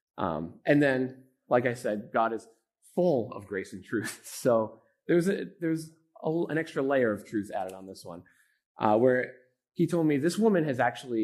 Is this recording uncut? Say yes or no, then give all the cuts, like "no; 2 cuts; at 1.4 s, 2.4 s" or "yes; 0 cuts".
yes; 0 cuts